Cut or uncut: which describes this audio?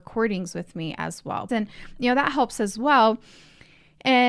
cut